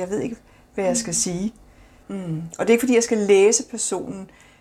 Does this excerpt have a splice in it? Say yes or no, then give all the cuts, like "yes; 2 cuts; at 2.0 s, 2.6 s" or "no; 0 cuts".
yes; 1 cut; at 2.0 s